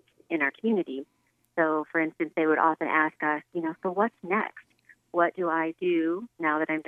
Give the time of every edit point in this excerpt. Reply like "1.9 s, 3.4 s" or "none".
none